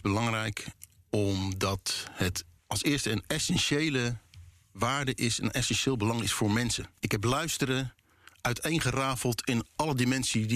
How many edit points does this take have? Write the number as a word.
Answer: one